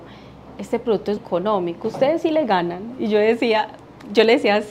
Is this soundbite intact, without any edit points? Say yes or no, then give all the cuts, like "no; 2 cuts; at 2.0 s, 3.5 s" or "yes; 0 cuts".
no; 1 cut; at 1.2 s